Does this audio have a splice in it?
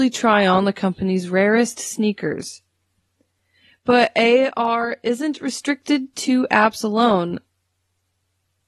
no; 0 cuts

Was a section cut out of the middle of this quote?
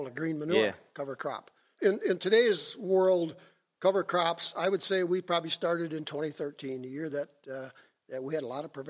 no; 0 cuts

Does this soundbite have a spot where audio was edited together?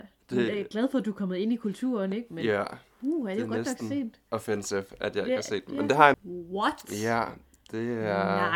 yes; 1 cut; at 6.1 s

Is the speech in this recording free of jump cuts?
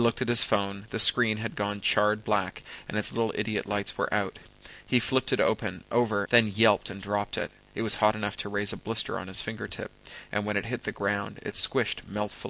no; 1 cut; at 6.3 s

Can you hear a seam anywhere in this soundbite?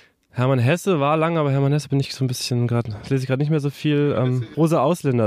no; 0 cuts

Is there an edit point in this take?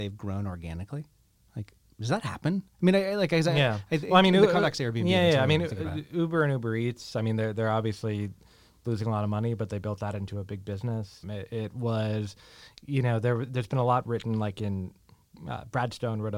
yes; 1 cut; at 11.2 s

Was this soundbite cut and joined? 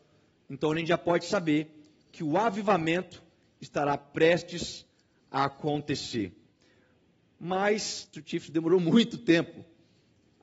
yes; 1 cut; at 8.1 s

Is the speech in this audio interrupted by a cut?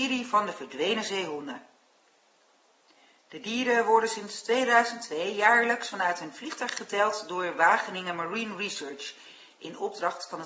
no; 0 cuts

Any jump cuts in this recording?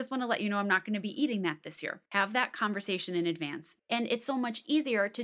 yes; 2 cuts; at 2.1 s, 3.8 s

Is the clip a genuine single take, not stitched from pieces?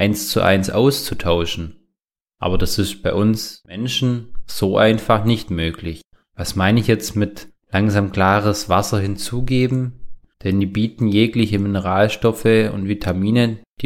no; 2 cuts; at 6.2 s, 10.3 s

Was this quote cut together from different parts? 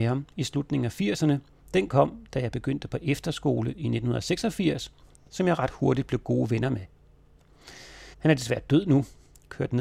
yes; 3 cuts; at 1.6 s, 5.2 s, 8.1 s

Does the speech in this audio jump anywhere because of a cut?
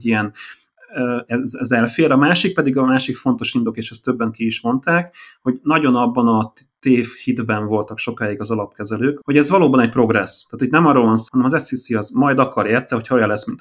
yes; 2 cuts; at 9.2 s, 11.3 s

